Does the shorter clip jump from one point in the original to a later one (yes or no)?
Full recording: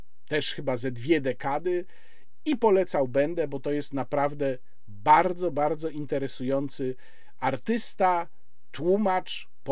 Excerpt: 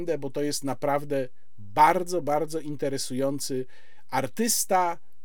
no